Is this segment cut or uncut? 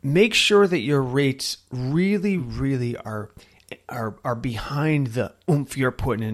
cut